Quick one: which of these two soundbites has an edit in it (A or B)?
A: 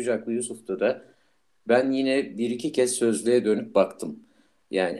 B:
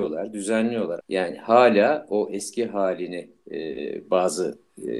B